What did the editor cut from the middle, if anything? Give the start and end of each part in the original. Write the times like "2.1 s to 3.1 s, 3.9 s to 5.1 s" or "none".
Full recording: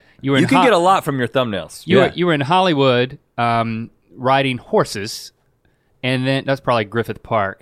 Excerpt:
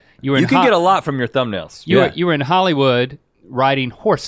3.3 s to 4.0 s